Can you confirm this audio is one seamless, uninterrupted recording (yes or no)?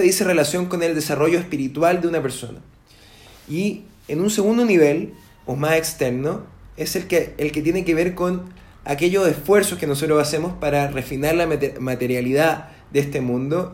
yes